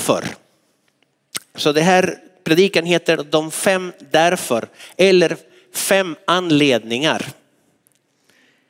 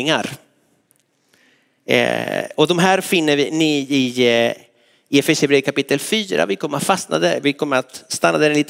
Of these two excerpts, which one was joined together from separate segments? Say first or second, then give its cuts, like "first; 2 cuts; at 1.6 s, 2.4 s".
first; 1 cut; at 1.5 s